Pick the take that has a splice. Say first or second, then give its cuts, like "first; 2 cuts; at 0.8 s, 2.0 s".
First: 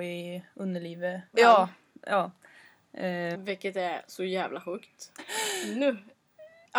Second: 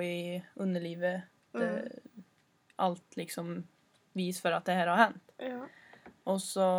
first; 3 cuts; at 1.3 s, 3.3 s, 5.2 s